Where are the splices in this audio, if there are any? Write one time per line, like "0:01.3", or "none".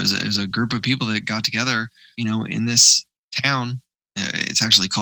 none